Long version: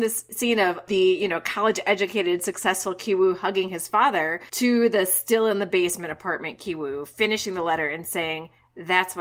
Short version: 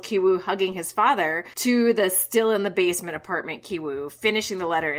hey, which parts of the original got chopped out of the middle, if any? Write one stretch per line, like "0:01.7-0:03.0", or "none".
none